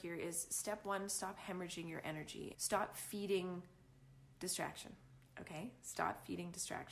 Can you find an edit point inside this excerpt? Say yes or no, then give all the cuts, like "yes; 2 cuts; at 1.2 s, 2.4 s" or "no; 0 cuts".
yes; 1 cut; at 2.5 s